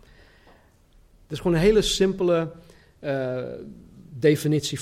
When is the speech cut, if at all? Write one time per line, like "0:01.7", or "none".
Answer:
0:01.1